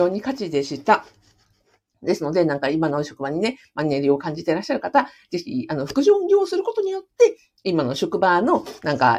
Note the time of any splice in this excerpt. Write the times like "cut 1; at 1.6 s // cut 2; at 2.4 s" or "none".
none